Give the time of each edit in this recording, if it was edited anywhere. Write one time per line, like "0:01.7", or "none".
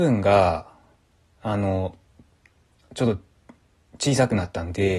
none